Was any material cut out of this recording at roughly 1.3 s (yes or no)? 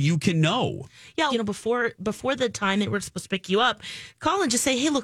yes